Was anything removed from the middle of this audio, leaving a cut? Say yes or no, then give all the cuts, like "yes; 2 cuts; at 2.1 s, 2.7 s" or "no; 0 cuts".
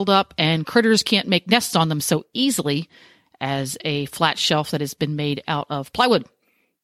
no; 0 cuts